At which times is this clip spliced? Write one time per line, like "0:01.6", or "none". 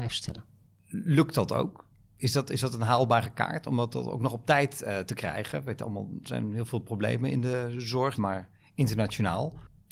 0:08.2